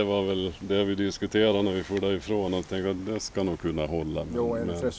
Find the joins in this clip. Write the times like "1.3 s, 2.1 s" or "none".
3.0 s